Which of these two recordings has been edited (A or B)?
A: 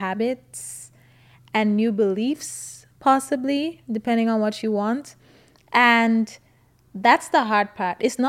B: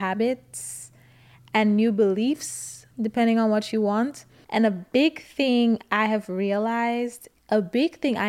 B